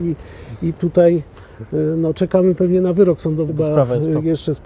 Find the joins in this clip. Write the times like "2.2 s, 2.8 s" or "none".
3.5 s